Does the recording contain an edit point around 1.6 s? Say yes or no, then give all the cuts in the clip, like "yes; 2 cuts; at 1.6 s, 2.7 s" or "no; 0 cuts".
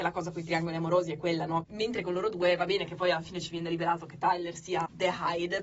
yes; 1 cut; at 1.6 s